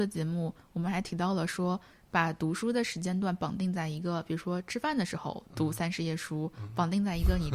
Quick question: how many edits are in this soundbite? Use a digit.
0